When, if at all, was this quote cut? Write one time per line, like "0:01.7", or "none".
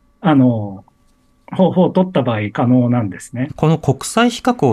0:03.5

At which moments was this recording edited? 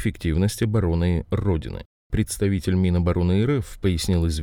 none

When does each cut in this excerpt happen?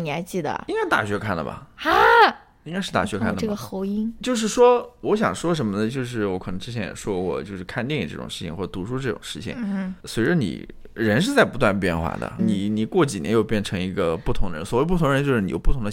0:10.0
0:12.4

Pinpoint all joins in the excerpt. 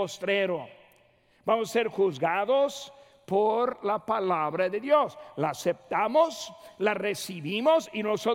none

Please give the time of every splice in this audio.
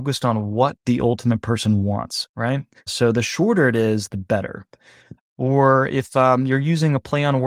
0:02.9
0:05.2

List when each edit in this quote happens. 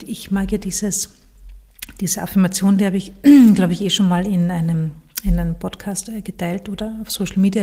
none

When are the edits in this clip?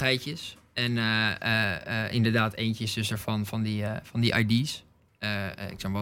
0:05.1

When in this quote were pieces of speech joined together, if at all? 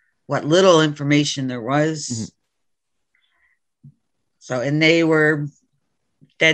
none

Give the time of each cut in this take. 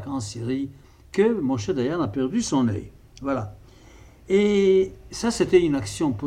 none

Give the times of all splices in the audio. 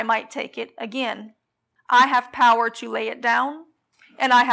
0:01.8

